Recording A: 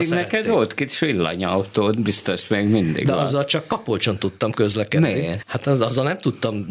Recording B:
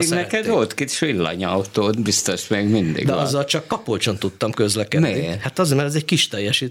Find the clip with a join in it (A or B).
A